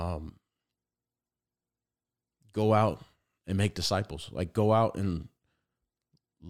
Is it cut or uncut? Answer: uncut